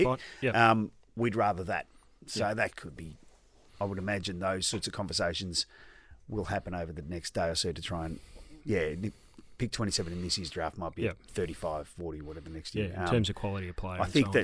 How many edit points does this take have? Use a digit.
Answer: 1